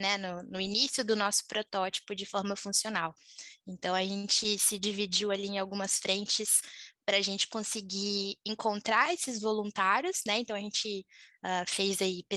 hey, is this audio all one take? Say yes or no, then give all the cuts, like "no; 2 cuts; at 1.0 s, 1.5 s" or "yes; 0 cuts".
yes; 0 cuts